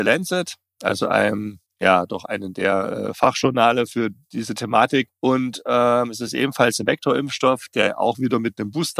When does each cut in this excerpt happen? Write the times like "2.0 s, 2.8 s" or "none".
3.9 s